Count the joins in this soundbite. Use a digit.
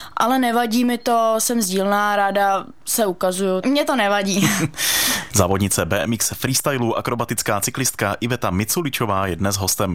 1